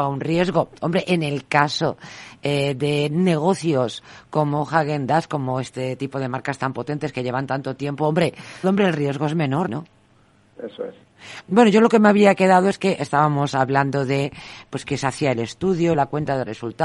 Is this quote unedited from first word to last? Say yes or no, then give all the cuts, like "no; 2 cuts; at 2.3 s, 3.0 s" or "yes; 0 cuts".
no; 3 cuts; at 8.6 s, 9.7 s, 15.9 s